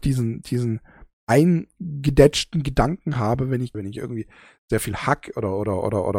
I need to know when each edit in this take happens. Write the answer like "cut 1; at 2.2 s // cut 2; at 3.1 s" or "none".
cut 1; at 3.7 s